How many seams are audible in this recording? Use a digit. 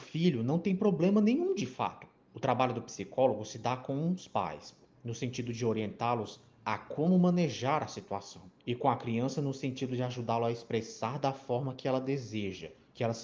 2